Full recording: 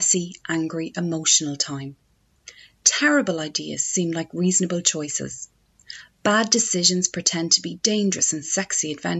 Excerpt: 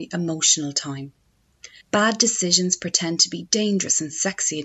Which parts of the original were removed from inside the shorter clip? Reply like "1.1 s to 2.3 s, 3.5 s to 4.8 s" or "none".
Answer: 2.6 s to 6.1 s